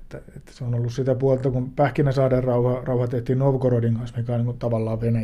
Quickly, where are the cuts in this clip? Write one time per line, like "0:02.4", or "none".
none